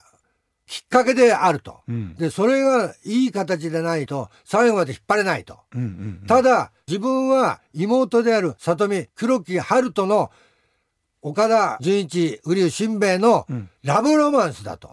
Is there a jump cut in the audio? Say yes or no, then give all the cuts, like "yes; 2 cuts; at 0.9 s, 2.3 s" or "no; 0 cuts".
no; 0 cuts